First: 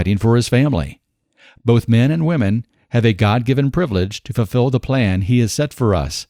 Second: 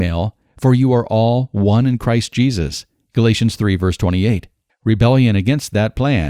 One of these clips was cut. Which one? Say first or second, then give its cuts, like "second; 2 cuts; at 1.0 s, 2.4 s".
second; 1 cut; at 4.7 s